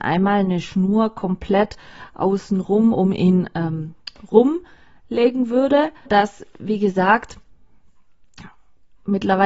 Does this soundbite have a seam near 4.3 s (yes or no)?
no